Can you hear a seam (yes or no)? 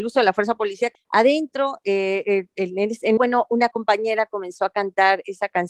yes